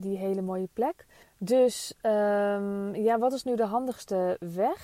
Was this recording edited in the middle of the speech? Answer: yes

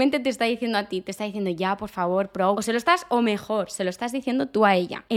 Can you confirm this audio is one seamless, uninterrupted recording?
no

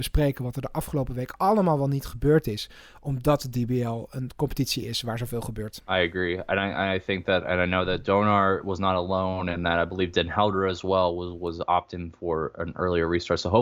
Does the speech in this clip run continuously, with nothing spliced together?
yes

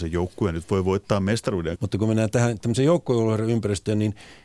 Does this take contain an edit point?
yes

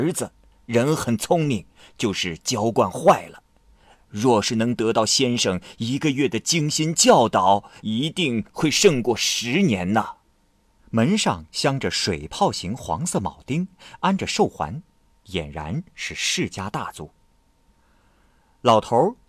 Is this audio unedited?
no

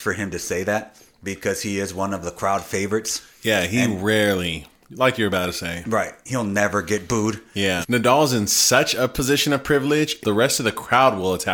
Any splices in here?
yes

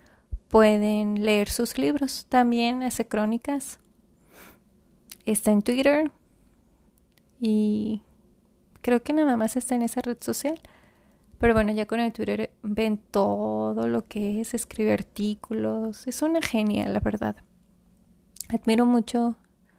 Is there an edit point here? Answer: no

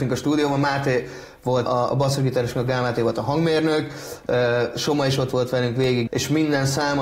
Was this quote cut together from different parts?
yes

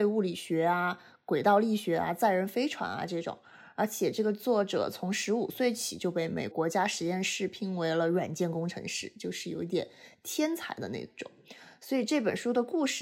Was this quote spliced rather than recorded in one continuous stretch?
yes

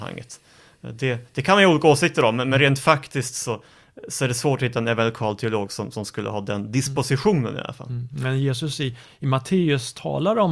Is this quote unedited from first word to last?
yes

